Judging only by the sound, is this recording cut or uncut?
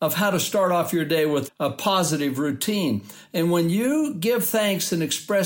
cut